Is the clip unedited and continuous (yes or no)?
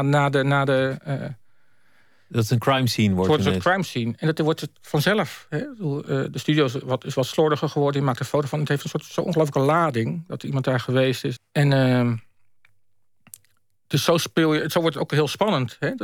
no